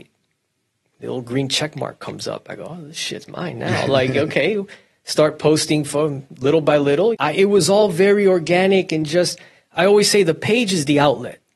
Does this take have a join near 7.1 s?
yes; 1 cut; at 7.1 s

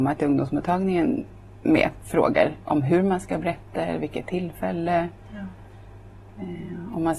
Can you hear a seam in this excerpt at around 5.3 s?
no; 0 cuts

